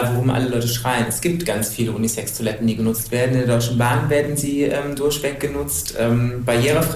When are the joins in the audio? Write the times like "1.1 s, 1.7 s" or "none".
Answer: none